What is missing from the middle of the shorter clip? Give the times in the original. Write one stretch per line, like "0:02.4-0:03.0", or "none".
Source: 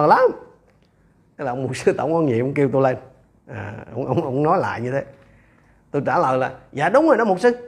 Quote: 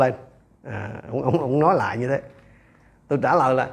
none